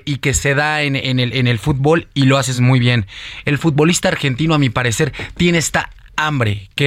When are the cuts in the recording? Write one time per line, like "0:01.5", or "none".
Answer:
none